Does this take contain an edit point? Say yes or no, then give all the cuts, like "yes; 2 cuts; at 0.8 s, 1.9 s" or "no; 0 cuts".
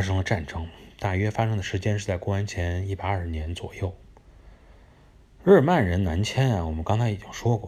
no; 0 cuts